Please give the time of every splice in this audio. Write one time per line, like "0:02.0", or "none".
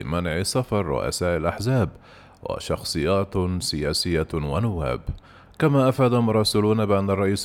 none